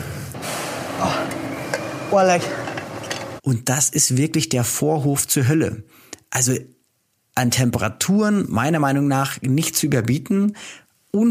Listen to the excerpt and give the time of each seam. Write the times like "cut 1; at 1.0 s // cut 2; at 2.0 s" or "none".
cut 1; at 3.4 s